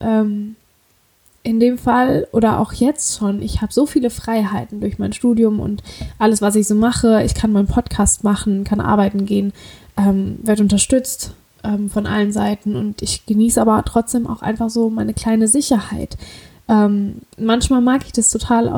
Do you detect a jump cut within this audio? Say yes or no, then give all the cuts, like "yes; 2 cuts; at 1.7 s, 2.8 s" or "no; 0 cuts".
no; 0 cuts